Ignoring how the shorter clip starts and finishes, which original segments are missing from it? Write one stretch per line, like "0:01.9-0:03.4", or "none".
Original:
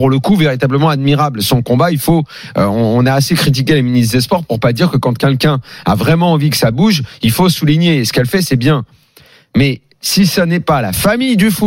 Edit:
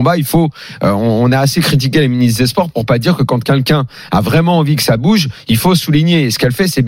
none